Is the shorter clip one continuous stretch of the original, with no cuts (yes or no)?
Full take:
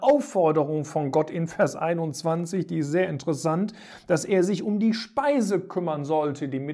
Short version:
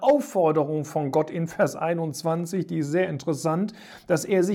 yes